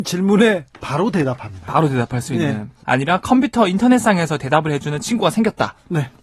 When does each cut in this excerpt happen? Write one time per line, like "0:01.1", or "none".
0:02.8